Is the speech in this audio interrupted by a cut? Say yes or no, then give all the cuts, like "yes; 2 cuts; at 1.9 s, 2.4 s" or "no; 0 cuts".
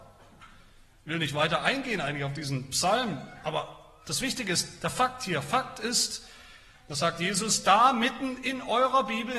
no; 0 cuts